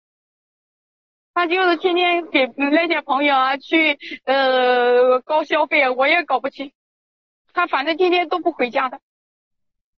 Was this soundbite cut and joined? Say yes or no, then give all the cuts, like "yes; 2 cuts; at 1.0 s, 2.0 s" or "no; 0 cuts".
no; 0 cuts